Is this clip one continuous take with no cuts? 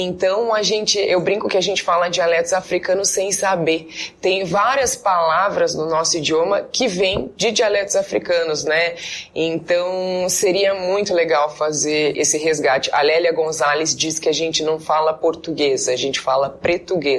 no; 1 cut; at 12.1 s

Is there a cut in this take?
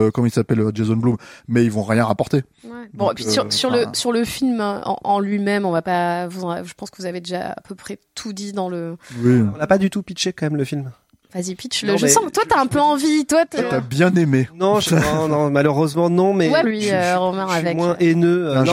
yes; 2 cuts; at 2.5 s, 16.6 s

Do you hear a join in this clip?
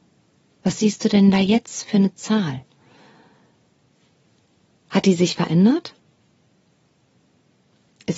no; 0 cuts

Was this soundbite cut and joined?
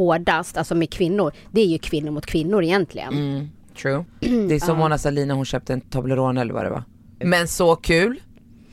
yes; 2 cuts; at 4.1 s, 7.2 s

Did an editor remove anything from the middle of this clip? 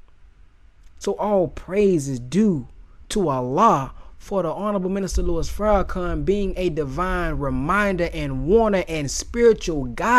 no; 0 cuts

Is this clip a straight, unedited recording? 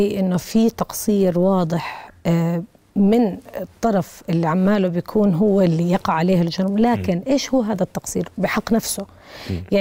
yes; 0 cuts

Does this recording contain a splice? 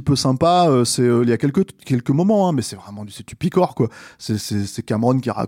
no; 0 cuts

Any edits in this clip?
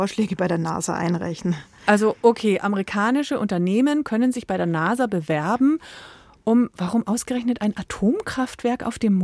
no; 0 cuts

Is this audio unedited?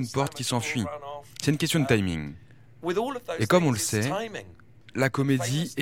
yes; 0 cuts

